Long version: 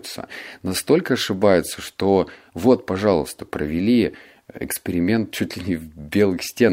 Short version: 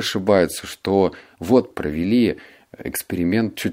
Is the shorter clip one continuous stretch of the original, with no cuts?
no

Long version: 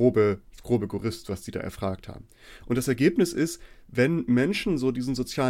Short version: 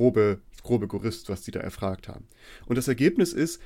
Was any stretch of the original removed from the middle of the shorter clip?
no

